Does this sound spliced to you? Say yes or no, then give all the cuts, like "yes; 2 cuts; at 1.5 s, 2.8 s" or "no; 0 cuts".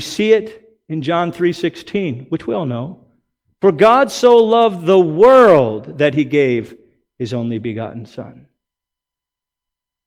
no; 0 cuts